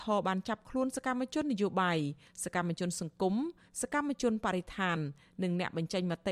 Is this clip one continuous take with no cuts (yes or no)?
yes